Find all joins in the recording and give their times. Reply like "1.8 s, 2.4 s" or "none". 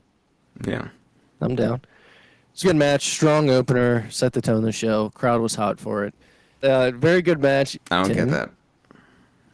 2.6 s, 6.6 s, 7.7 s